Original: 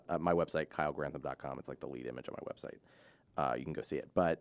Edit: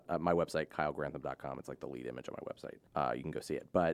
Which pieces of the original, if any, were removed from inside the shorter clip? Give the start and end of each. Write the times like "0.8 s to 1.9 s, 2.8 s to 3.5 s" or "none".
2.9 s to 3.3 s